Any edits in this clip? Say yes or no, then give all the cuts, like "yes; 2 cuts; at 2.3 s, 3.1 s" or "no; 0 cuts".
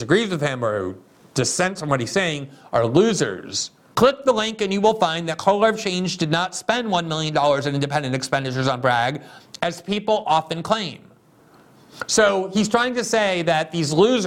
yes; 1 cut; at 3.9 s